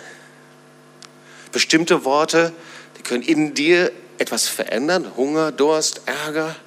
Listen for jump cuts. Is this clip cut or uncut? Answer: uncut